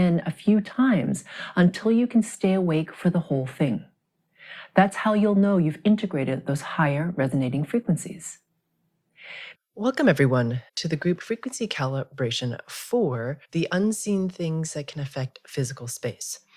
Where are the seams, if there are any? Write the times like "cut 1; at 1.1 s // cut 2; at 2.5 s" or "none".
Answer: cut 1; at 9.5 s // cut 2; at 10.7 s // cut 3; at 13.4 s